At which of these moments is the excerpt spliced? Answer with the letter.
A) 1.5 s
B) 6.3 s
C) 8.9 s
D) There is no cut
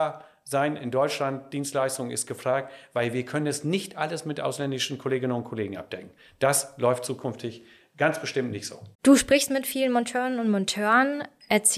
C